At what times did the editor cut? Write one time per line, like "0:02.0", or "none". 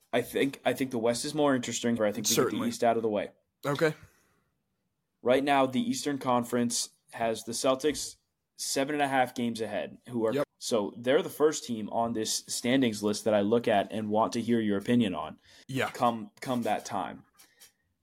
0:02.0
0:10.4
0:15.6